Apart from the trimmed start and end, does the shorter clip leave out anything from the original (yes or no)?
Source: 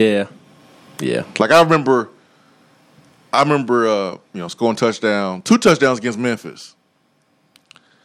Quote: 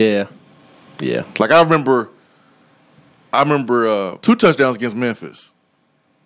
yes